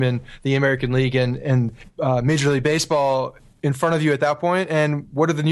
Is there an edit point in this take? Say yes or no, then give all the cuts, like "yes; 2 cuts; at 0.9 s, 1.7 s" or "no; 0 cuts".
no; 0 cuts